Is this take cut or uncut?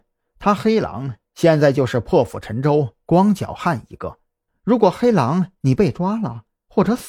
cut